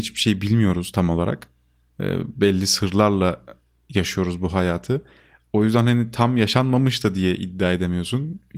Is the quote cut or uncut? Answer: uncut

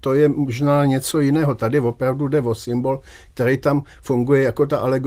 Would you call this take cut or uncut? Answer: uncut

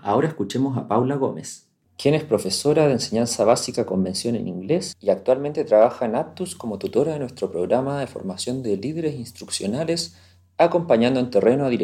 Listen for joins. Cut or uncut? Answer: uncut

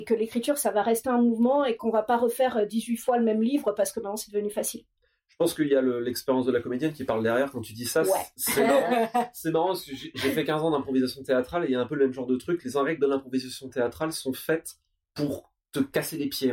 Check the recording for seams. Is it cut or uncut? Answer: uncut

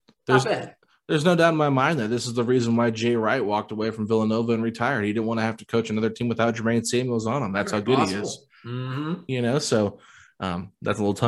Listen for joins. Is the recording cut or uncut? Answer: uncut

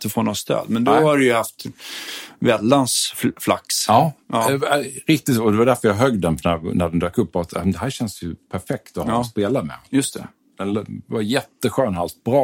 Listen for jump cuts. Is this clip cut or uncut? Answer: uncut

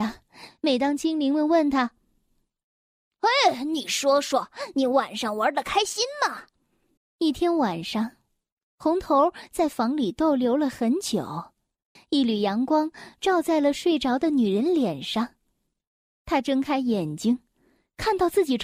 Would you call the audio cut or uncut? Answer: cut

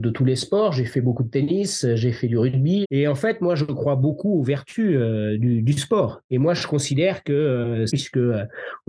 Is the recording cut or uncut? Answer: cut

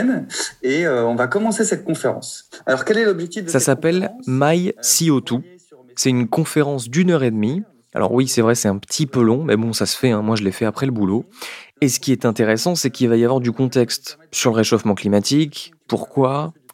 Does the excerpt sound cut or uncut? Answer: uncut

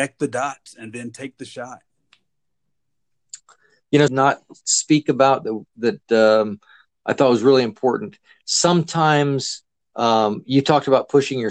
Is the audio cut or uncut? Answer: cut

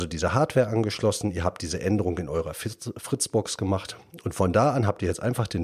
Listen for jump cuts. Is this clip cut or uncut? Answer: uncut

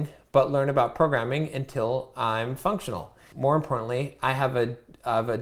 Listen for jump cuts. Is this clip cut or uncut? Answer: cut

